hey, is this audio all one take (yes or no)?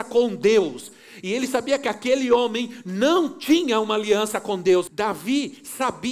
no